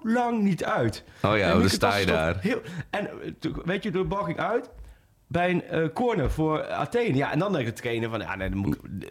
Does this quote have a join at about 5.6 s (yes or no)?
no